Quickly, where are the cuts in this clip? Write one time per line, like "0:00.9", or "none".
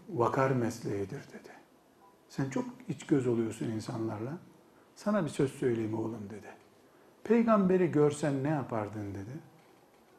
none